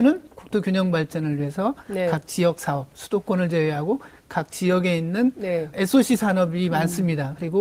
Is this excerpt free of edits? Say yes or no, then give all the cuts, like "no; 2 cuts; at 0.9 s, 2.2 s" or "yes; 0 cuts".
no; 1 cut; at 5.7 s